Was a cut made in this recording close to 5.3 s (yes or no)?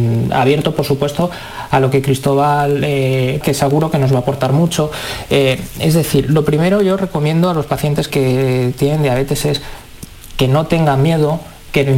no